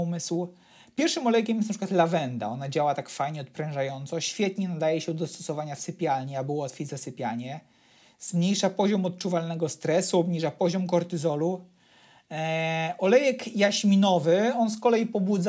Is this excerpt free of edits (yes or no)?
yes